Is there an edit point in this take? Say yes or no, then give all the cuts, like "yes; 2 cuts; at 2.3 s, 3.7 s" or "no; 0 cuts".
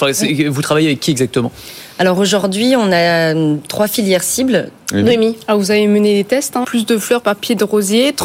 yes; 2 cuts; at 4.8 s, 6.6 s